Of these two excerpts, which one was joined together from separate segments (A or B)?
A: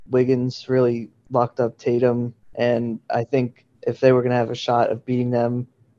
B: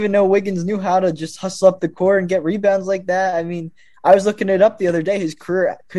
A